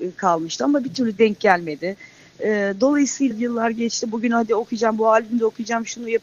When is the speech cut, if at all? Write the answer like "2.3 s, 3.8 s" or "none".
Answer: 3.3 s